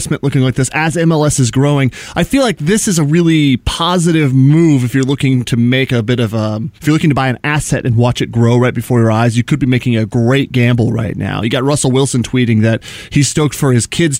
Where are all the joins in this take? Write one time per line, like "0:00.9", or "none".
0:06.8